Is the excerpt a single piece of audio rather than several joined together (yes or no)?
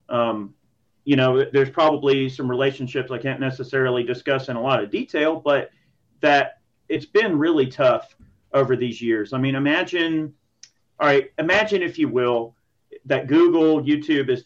yes